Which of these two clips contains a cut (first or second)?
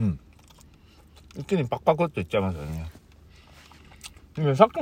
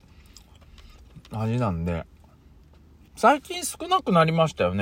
second